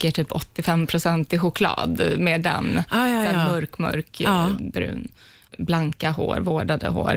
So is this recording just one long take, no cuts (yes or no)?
yes